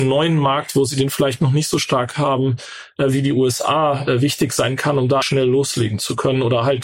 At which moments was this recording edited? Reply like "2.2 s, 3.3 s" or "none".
5.2 s